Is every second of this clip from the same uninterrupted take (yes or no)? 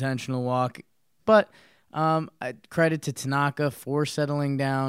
no